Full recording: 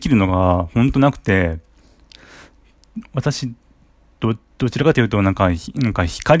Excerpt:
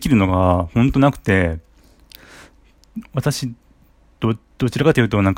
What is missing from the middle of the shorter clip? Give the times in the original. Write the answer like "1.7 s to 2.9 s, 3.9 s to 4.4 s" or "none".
none